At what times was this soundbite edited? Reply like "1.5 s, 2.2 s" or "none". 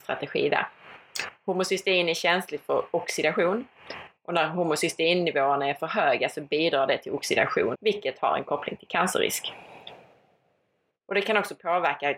7.7 s